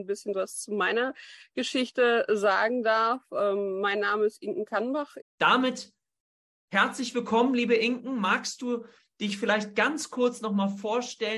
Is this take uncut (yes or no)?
no